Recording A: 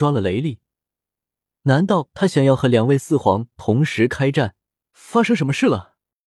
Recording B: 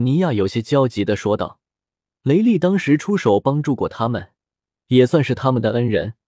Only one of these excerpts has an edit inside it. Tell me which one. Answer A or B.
A